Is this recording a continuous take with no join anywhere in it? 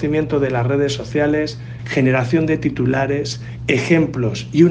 no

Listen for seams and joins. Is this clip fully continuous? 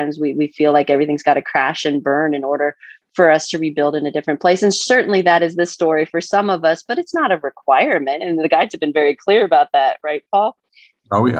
yes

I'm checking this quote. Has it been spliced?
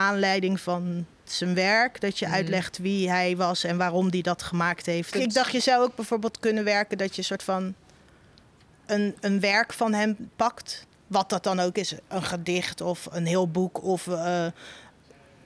yes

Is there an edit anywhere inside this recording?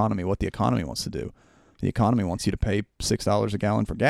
no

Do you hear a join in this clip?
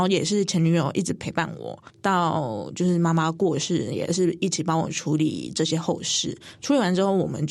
no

